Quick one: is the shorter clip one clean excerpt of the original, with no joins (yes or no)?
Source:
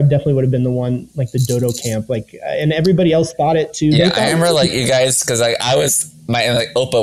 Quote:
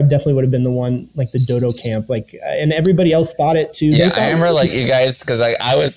yes